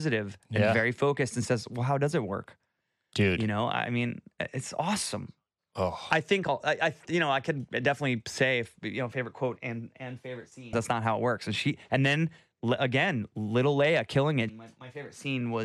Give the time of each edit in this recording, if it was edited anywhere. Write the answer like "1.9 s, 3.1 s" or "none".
10.7 s, 14.5 s